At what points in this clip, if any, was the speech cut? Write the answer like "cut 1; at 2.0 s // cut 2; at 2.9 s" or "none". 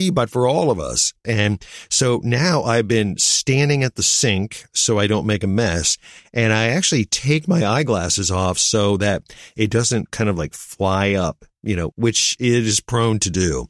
cut 1; at 1.2 s // cut 2; at 11.9 s